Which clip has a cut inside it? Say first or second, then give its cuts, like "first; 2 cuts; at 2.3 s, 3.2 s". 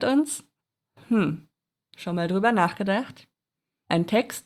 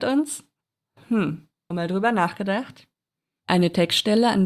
second; 2 cuts; at 1.7 s, 3.4 s